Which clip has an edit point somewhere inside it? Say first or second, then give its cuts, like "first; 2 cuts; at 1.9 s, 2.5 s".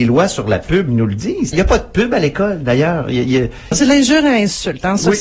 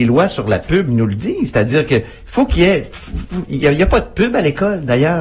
first; 2 cuts; at 1.5 s, 3.7 s